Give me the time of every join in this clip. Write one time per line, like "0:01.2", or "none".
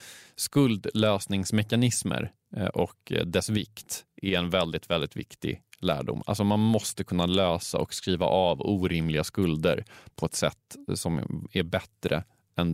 none

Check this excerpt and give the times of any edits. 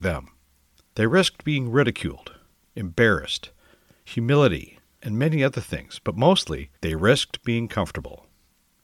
0:05.0
0:06.8

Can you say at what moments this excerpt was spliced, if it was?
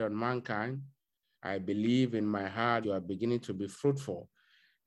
0:01.3
0:02.8

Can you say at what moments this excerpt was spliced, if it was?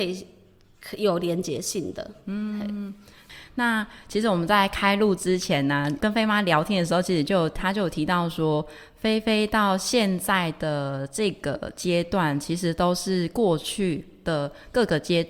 0:06.0

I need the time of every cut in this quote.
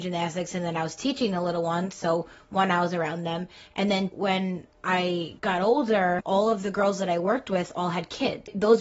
0:04.1
0:06.2

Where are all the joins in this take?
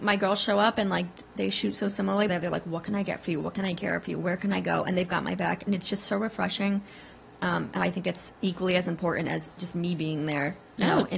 0:02.3

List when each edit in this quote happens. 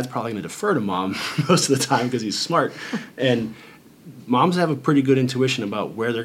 none

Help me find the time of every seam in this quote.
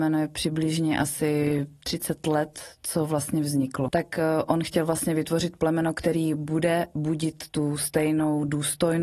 0:03.9

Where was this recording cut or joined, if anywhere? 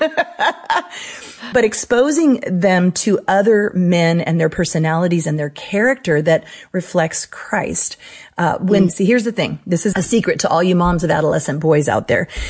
0:01.5
0:08.9
0:09.9

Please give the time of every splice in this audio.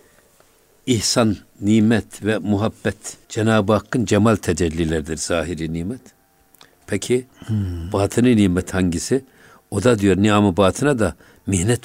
0:03.2

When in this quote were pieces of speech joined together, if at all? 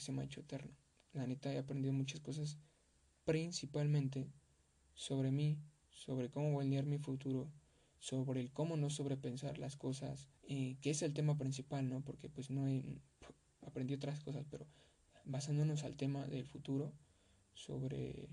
0:10.4

